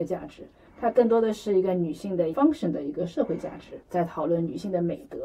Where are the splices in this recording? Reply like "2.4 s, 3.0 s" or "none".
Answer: 3.8 s